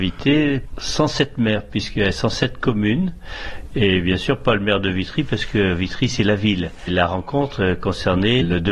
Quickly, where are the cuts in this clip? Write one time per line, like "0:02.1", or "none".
none